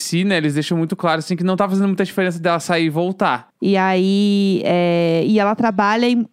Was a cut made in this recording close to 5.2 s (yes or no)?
no